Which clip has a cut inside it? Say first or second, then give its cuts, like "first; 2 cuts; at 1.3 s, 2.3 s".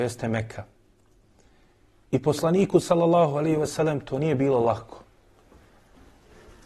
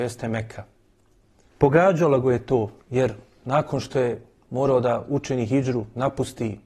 second; 2 cuts; at 1.5 s, 2.8 s